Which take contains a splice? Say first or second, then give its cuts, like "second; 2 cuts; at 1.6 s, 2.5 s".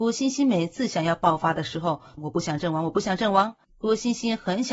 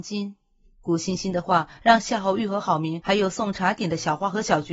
first; 2 cuts; at 2.2 s, 3.6 s